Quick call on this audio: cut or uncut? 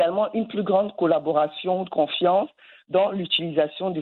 uncut